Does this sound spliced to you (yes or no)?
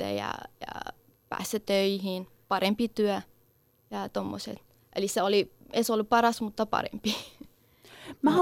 no